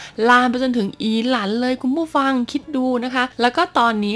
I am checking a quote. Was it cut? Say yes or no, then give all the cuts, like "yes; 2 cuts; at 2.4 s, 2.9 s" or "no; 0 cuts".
no; 0 cuts